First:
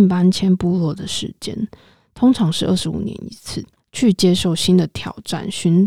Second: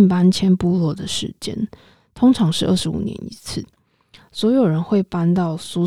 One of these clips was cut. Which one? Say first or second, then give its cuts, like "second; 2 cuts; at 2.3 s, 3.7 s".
first; 1 cut; at 3.8 s